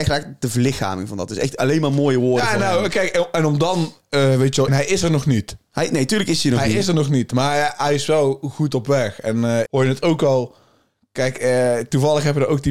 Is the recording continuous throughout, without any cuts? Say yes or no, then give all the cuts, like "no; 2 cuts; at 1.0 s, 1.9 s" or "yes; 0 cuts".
no; 2 cuts; at 4.7 s, 9.7 s